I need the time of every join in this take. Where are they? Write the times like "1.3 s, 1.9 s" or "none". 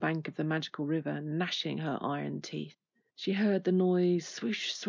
3.1 s